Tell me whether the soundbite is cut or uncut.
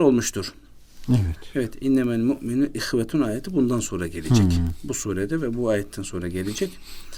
uncut